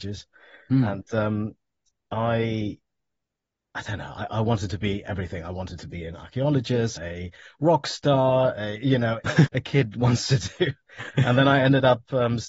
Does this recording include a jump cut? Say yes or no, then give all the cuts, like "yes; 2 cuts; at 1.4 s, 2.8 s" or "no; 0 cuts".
yes; 2 cuts; at 7.0 s, 9.5 s